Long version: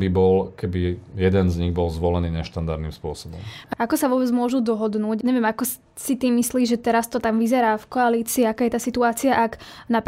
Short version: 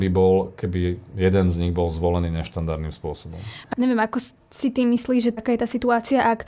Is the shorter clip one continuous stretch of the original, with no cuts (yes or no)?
no